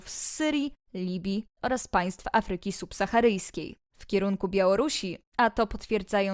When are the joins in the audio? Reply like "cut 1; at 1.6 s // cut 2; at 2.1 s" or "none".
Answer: cut 1; at 3.8 s